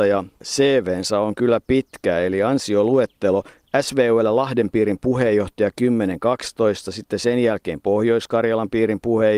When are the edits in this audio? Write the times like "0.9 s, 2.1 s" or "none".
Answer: none